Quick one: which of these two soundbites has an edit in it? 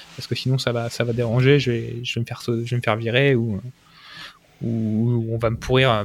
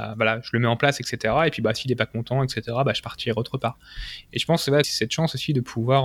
second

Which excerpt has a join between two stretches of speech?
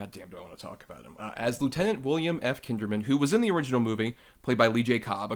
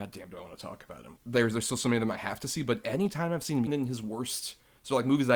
second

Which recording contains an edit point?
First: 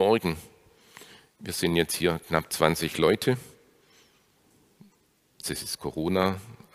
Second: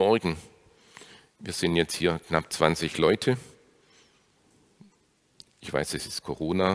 first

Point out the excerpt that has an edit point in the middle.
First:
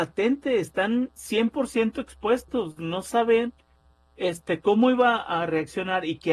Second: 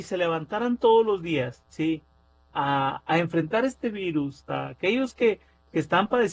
second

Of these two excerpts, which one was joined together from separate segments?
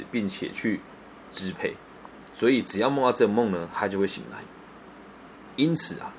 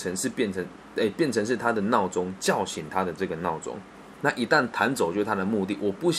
second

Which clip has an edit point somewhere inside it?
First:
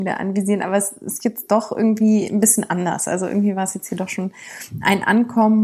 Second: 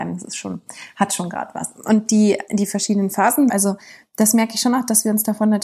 second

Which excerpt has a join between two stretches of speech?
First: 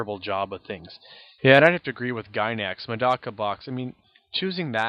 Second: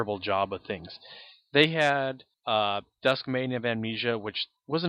first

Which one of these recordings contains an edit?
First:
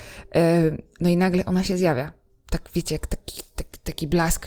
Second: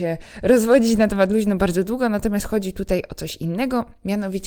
first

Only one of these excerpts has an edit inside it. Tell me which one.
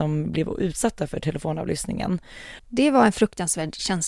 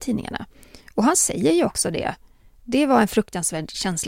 first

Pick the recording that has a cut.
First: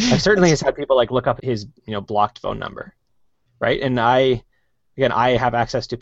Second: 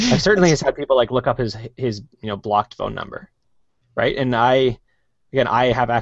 first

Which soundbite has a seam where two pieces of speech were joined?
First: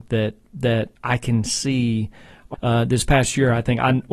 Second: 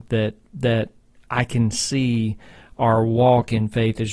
first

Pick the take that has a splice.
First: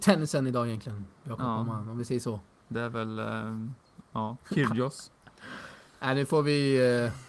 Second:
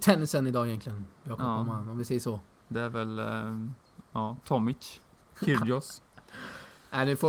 first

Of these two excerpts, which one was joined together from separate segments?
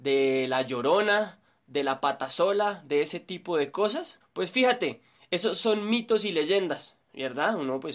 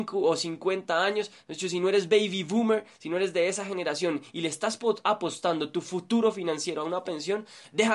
first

